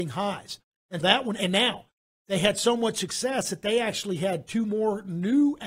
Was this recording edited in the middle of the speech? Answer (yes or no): yes